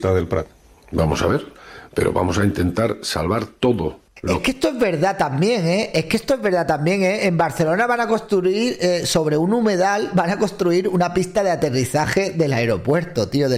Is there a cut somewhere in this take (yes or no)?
no